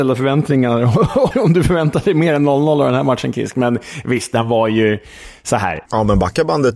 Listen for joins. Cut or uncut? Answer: cut